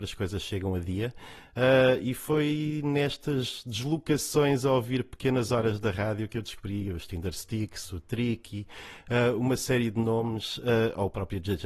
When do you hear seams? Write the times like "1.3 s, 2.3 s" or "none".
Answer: none